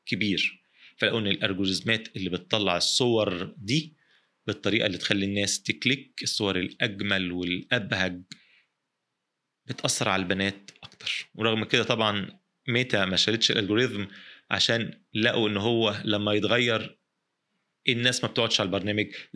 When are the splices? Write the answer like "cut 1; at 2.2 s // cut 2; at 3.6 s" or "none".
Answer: none